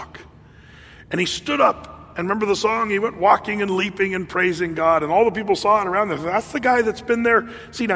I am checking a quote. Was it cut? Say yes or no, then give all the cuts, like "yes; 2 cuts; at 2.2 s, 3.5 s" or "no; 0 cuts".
no; 0 cuts